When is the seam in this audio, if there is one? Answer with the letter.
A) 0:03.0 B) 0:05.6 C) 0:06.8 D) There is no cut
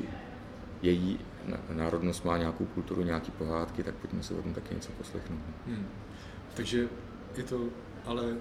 D